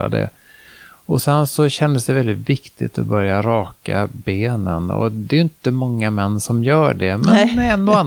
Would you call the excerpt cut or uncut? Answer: uncut